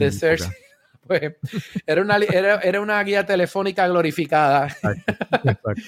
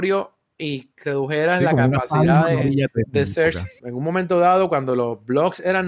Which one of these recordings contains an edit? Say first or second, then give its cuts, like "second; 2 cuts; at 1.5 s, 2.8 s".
second; 1 cut; at 3.8 s